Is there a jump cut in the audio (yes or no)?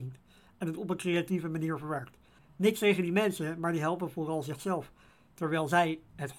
yes